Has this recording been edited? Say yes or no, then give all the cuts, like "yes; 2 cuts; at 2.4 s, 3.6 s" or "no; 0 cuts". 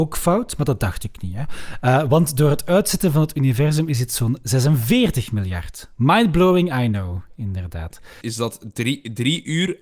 yes; 1 cut; at 8.2 s